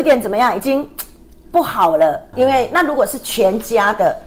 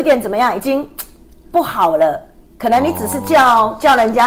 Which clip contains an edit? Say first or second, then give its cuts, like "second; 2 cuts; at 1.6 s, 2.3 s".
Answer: first; 1 cut; at 2.3 s